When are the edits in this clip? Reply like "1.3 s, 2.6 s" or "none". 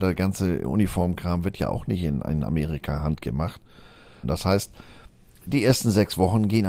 4.2 s